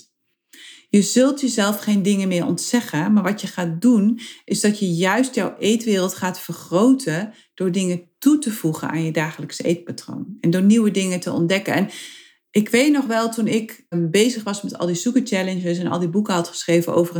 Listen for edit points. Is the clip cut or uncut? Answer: cut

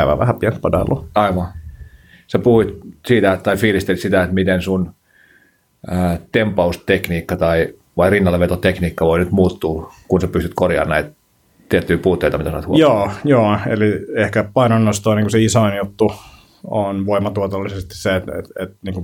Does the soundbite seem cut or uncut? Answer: uncut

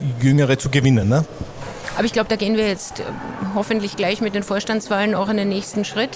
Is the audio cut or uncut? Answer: uncut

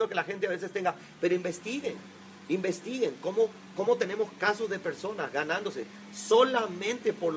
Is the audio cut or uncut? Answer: uncut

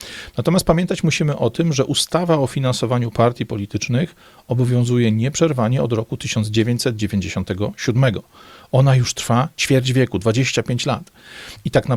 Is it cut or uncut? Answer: uncut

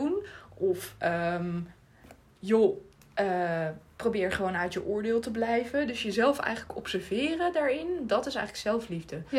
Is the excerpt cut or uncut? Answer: uncut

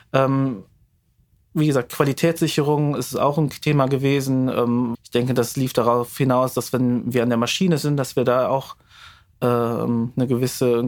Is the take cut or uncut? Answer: cut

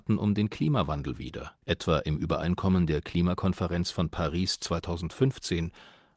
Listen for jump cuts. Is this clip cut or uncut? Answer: cut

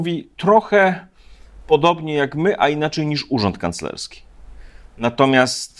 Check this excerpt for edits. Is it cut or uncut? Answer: uncut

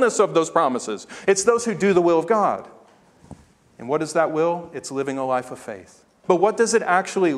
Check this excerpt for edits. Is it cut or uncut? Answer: cut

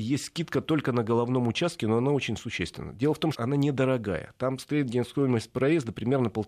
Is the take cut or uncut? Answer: cut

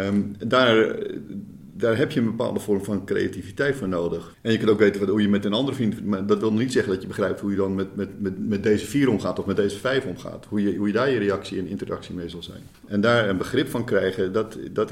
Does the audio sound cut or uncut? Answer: cut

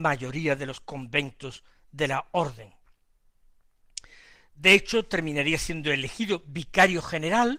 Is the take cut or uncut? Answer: uncut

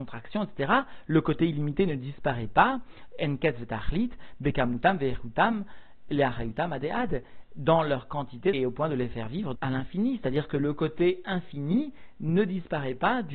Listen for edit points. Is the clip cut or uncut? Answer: cut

